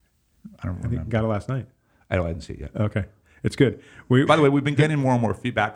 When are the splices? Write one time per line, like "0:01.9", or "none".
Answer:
0:04.3